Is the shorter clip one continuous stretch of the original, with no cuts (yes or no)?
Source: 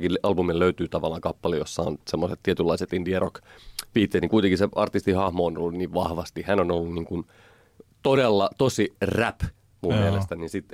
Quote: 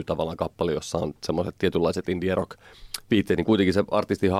yes